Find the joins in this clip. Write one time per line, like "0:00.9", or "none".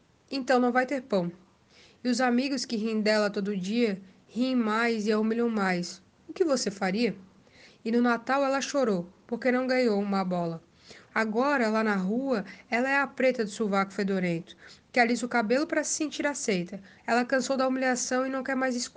0:07.7
0:11.1
0:17.0

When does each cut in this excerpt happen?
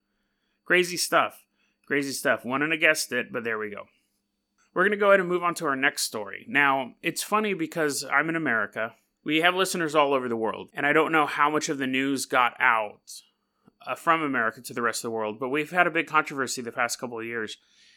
none

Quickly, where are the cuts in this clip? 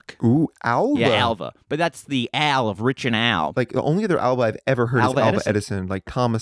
none

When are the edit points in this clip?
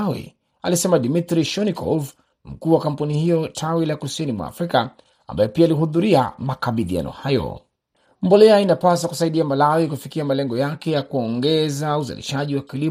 none

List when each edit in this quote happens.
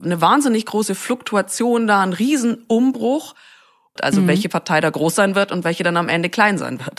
0:04.0

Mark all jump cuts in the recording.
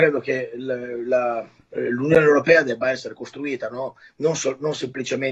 none

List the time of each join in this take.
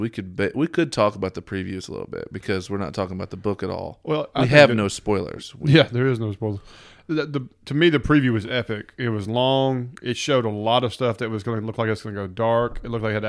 none

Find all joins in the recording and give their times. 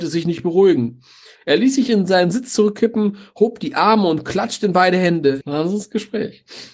0:05.4

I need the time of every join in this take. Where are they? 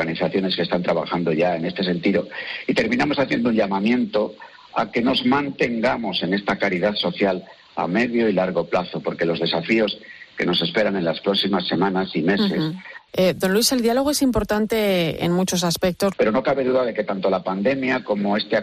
0:13.1
0:16.1

